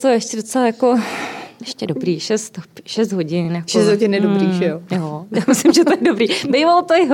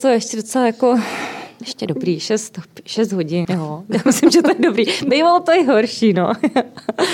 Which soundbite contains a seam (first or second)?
second